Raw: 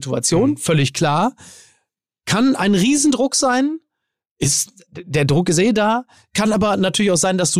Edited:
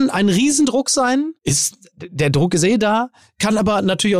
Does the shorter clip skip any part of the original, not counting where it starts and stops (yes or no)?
yes